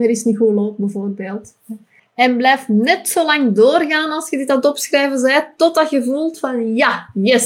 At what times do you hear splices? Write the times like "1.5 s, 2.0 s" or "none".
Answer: 2.0 s